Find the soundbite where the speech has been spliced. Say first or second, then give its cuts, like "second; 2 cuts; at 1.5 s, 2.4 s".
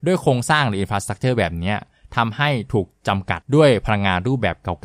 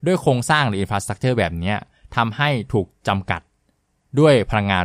first; 1 cut; at 3.4 s